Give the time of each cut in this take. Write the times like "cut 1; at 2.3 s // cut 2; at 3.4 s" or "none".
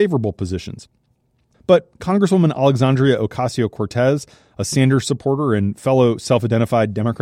cut 1; at 1.5 s